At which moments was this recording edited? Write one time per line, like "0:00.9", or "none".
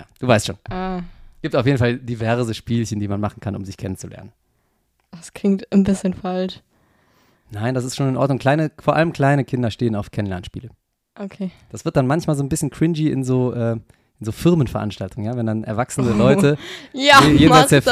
none

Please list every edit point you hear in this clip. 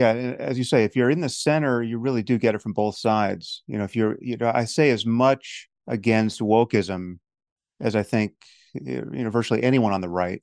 0:05.8

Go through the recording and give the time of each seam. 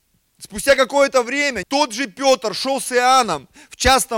0:01.6

